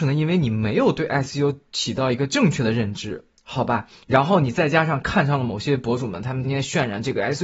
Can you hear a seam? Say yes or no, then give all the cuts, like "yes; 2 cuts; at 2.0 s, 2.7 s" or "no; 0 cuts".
yes; 1 cut; at 6.4 s